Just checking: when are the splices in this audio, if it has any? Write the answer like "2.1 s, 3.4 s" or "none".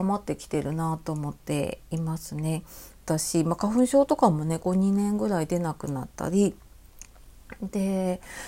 3.0 s, 4.6 s